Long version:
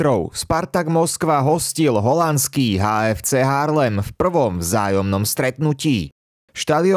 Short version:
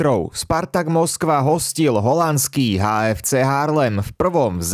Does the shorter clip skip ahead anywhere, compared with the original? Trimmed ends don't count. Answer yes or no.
no